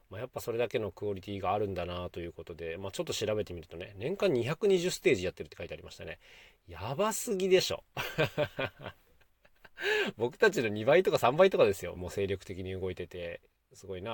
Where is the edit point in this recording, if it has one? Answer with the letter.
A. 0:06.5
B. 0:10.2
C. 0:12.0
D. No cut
C